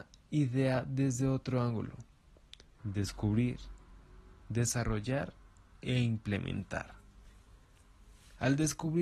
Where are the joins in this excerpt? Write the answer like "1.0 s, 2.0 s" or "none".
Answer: 2.8 s, 4.5 s